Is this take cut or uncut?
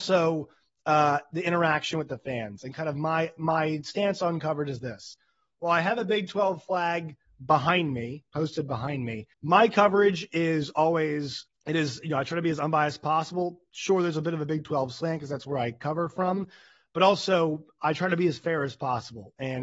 cut